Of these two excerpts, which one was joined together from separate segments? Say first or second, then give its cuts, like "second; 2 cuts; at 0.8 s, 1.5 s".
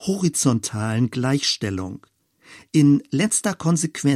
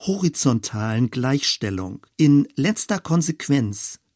second; 1 cut; at 2.1 s